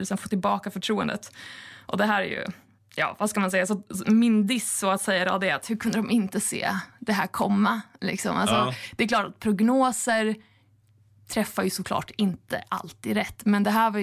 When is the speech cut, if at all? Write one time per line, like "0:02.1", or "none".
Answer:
none